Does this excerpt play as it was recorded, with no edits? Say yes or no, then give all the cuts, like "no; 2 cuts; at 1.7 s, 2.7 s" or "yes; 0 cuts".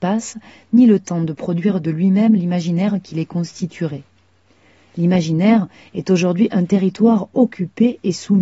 yes; 0 cuts